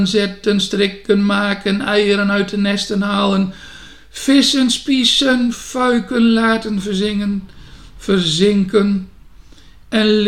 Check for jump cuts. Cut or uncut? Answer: uncut